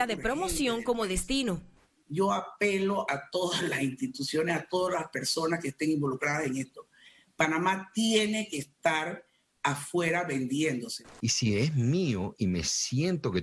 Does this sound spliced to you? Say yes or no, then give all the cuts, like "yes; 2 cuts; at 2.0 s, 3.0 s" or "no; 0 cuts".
yes; 1 cut; at 11.2 s